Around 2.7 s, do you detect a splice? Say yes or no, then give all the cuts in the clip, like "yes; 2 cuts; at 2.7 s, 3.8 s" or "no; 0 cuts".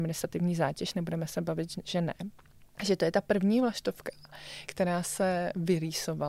yes; 2 cuts; at 2.7 s, 4.7 s